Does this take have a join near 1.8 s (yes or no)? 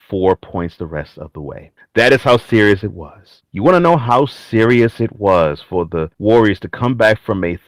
yes